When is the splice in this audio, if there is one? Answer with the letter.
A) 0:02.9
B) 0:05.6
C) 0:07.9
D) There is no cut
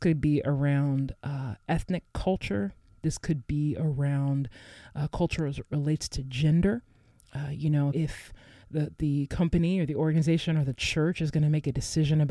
C